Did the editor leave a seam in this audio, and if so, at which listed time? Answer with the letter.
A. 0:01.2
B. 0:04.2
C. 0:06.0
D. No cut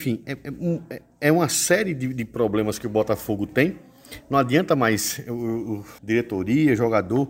C